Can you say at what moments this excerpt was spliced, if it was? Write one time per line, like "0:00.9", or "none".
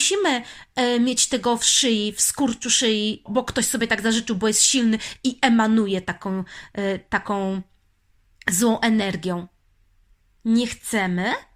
0:03.3